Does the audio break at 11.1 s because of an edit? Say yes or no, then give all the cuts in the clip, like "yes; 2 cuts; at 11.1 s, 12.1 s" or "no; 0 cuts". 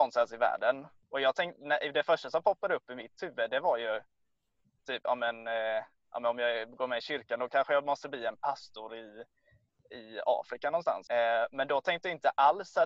yes; 2 cuts; at 1.0 s, 11.1 s